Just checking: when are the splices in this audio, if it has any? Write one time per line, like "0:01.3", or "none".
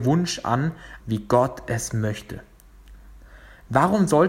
0:01.0